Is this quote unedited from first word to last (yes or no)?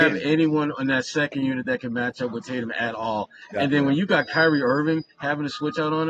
yes